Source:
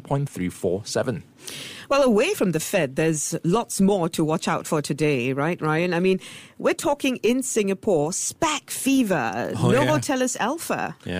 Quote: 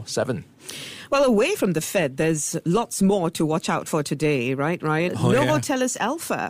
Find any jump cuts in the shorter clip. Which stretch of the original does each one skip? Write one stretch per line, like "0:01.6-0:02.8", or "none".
0:05.9-0:09.5